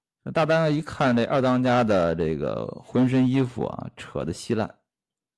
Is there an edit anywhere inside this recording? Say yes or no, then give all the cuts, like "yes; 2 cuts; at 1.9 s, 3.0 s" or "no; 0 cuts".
no; 0 cuts